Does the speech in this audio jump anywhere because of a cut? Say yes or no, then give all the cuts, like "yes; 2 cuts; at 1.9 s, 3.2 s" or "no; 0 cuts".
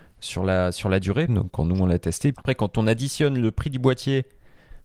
yes; 2 cuts; at 1.3 s, 2.3 s